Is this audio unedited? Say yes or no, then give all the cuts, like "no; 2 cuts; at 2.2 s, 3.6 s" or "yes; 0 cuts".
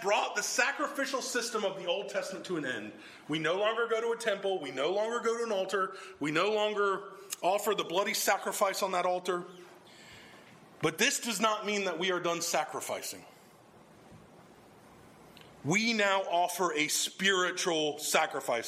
yes; 0 cuts